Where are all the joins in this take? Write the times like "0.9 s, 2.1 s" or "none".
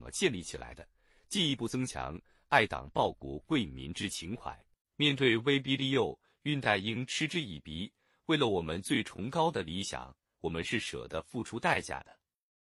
4.8 s